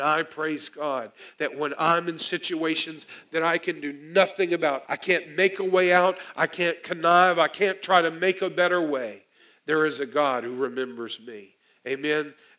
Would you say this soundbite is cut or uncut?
cut